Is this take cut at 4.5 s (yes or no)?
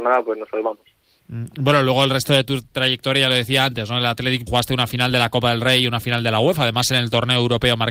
yes